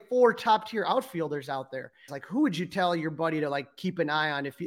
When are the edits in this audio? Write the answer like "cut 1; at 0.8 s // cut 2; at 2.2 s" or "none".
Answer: cut 1; at 2.1 s

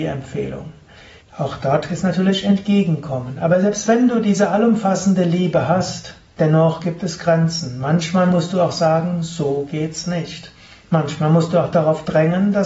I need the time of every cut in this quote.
cut 1; at 1.2 s

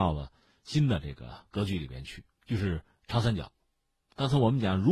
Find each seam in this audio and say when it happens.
cut 1; at 2.3 s

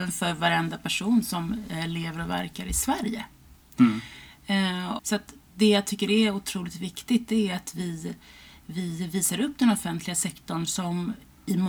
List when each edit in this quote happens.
cut 1; at 5.0 s

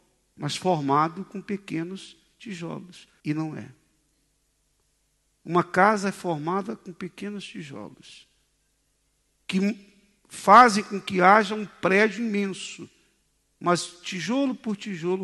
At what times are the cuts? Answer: cut 1; at 3.2 s

